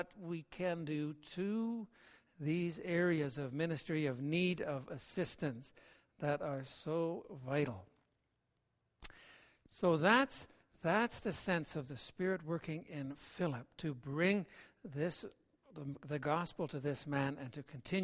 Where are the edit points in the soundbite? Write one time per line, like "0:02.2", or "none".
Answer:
none